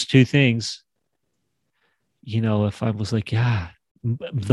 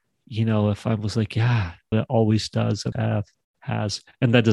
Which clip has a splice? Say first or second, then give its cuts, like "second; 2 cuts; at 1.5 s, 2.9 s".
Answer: second; 2 cuts; at 1.9 s, 2.9 s